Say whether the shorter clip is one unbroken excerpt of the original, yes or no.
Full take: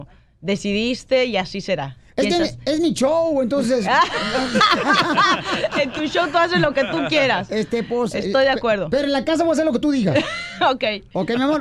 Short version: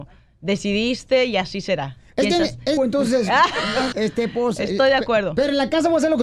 no